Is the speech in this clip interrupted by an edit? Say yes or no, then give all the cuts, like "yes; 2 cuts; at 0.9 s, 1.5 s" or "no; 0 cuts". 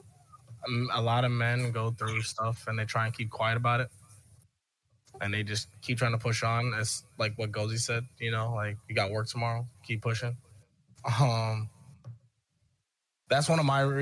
no; 0 cuts